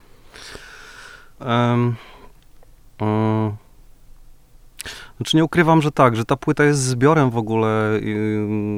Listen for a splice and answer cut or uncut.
cut